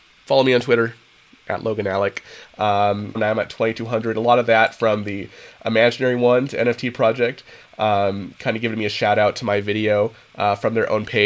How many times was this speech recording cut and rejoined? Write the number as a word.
one